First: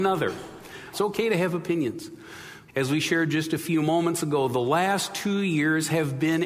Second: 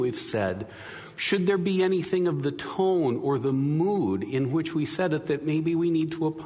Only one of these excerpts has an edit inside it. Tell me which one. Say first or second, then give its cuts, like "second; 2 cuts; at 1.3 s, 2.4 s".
first; 2 cuts; at 0.9 s, 2.7 s